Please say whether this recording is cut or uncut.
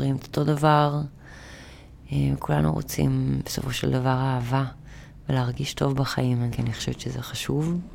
cut